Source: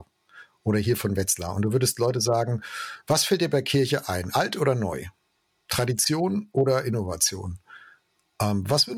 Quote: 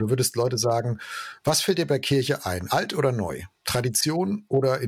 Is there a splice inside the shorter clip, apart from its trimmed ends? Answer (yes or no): yes